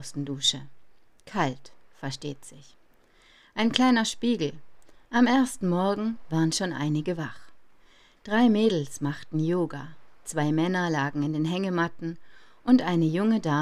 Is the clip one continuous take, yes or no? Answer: no